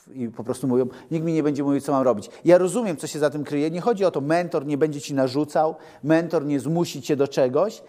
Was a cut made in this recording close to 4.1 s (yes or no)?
no